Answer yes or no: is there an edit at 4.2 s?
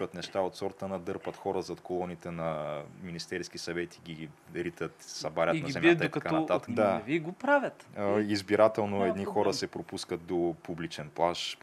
no